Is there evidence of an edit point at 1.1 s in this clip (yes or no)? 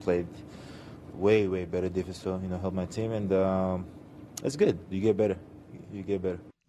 yes